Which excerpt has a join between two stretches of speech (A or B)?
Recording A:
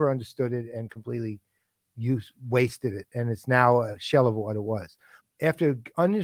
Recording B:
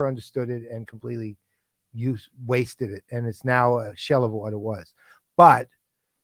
A